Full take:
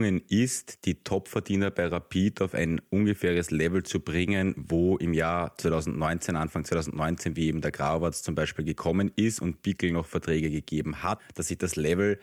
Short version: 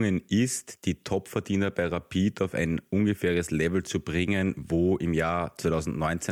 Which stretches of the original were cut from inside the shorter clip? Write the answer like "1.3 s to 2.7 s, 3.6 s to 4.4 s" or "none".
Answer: none